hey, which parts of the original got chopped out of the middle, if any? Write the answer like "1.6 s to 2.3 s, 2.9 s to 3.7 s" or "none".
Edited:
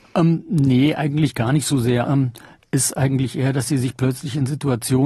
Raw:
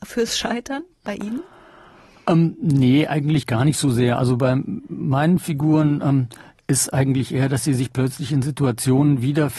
4.2 s to 6.0 s